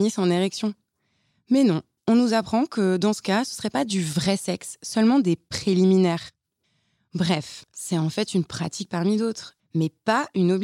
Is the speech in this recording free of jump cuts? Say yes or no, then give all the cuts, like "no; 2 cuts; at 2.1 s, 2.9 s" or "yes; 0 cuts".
no; 2 cuts; at 7.7 s, 9.6 s